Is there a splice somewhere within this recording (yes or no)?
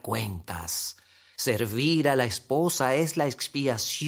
no